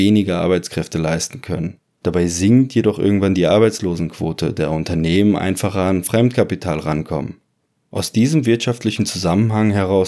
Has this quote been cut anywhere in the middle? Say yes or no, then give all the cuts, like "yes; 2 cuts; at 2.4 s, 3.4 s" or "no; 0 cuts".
yes; 1 cut; at 2.0 s